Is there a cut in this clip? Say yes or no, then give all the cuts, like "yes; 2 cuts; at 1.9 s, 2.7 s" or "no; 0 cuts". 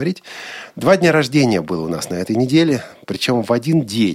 no; 0 cuts